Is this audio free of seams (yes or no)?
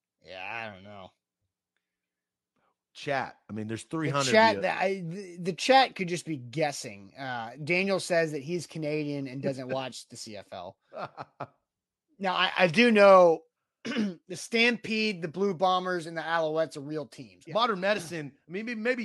no